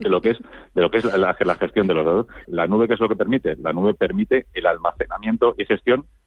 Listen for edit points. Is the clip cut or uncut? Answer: cut